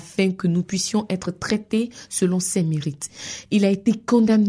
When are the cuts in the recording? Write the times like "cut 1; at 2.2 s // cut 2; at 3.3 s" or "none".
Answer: none